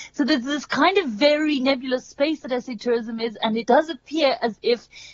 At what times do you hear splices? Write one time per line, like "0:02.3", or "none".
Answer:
none